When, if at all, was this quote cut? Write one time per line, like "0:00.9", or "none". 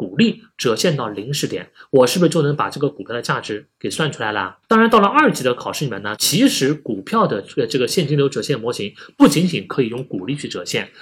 0:04.6
0:06.2